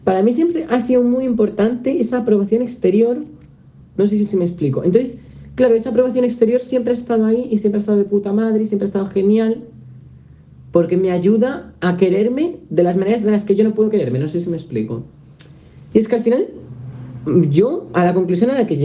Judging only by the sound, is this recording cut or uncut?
cut